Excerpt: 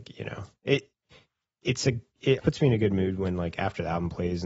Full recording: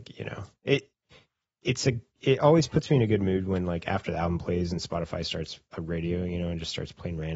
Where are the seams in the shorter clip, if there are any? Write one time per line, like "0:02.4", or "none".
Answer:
0:02.4